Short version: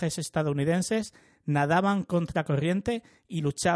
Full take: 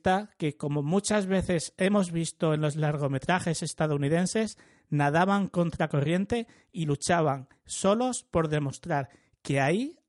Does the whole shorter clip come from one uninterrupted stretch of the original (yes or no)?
yes